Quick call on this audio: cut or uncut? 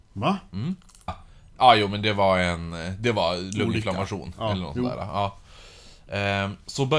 cut